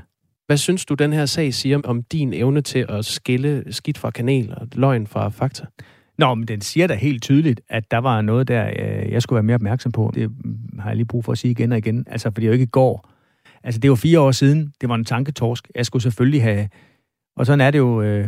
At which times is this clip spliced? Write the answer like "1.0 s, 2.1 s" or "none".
1.8 s, 10.1 s